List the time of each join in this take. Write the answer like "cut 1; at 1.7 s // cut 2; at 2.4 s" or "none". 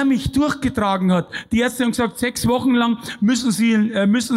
none